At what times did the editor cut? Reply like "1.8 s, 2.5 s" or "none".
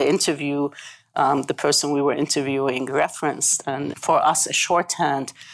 3.9 s